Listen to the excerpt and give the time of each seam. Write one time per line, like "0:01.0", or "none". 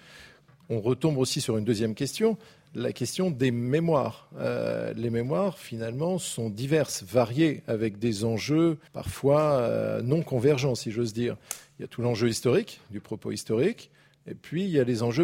0:08.9